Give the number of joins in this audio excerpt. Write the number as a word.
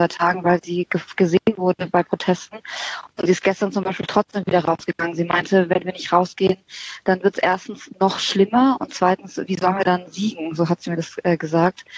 zero